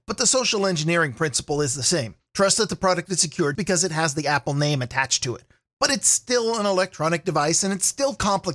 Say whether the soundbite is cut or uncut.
cut